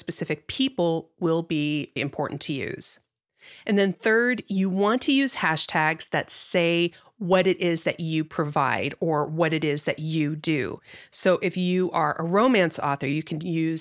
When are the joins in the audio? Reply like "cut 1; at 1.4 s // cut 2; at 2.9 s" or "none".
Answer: cut 1; at 2.0 s